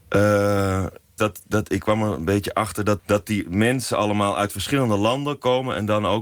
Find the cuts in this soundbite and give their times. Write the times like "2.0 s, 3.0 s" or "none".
1.2 s, 3.0 s

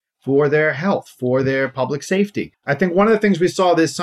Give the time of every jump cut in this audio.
2.5 s

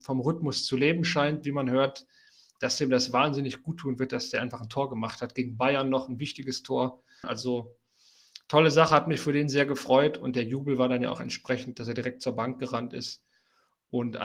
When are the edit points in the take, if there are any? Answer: 7.2 s

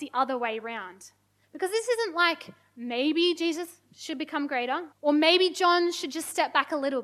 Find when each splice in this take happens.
1.4 s, 4.9 s

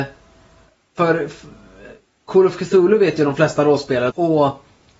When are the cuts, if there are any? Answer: 4.1 s

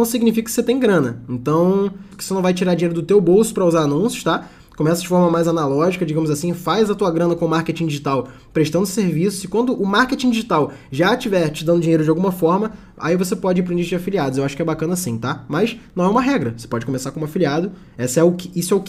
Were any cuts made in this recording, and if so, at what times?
2.1 s

